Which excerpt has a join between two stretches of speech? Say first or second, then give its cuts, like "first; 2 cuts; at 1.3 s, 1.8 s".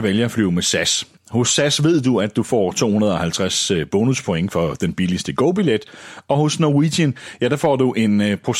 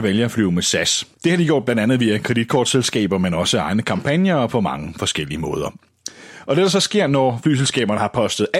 second; 1 cut; at 1.1 s